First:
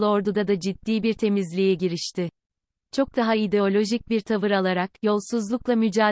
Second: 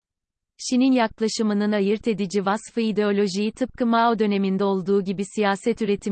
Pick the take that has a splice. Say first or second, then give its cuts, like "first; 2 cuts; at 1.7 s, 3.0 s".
first; 1 cut; at 2.8 s